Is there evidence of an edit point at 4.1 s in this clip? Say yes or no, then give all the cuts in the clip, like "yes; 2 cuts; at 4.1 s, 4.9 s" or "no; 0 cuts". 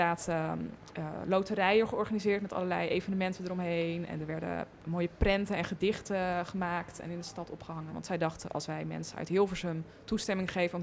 no; 1 cut; at 7.9 s